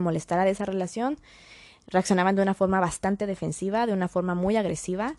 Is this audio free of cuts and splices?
yes; 0 cuts

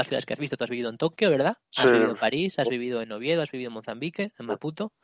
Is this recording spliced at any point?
yes; 1 cut; at 1.6 s

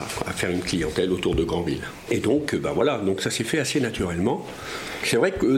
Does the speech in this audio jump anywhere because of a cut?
yes; 1 cut; at 2.1 s

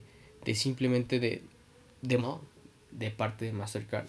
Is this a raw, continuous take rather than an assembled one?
no; 1 cut; at 2.2 s

